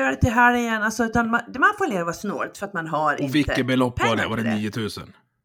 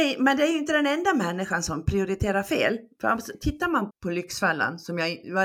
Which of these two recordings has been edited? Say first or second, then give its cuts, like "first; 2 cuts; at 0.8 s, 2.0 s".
second; 1 cut; at 3.9 s